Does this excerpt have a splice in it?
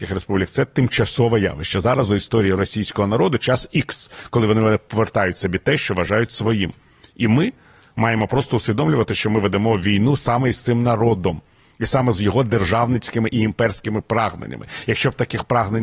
no; 0 cuts

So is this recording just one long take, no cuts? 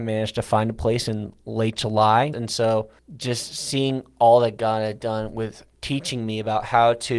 no; 1 cut; at 2.3 s

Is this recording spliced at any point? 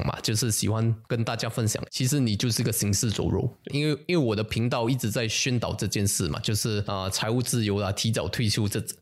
yes; 2 cuts; at 1.9 s, 3.7 s

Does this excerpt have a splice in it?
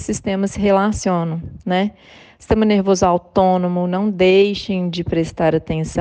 no; 0 cuts

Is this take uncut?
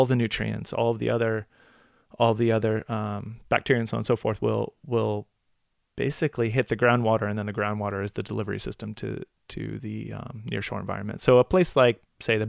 yes; 0 cuts

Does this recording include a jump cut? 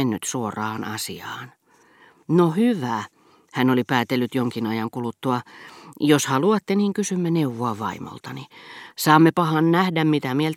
yes; 1 cut; at 8.9 s

